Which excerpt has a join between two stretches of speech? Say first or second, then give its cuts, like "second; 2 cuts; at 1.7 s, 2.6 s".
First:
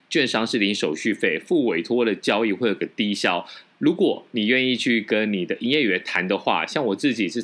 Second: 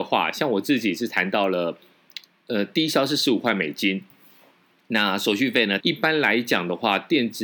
second; 1 cut; at 5.8 s